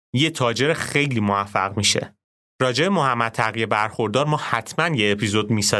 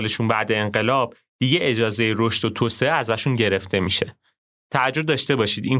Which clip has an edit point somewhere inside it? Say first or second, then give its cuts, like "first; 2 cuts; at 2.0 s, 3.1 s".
first; 1 cut; at 2.4 s